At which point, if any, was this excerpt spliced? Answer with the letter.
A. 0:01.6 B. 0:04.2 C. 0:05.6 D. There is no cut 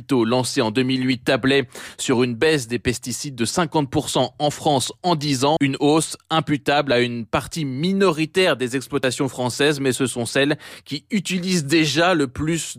C